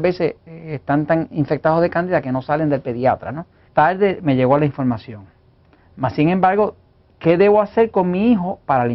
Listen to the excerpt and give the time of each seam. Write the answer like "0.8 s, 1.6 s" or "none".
3.7 s